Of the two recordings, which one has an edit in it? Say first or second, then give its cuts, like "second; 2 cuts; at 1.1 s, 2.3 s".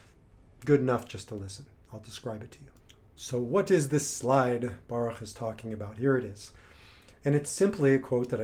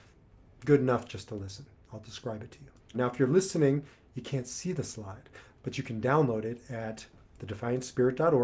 second; 1 cut; at 2.9 s